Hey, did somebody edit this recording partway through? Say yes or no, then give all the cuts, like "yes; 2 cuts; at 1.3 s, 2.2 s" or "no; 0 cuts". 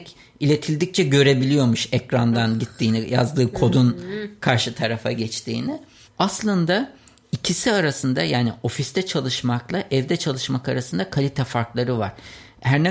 yes; 1 cut; at 6.0 s